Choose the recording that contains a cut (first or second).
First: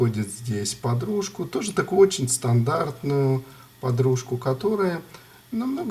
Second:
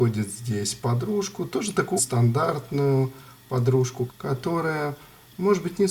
second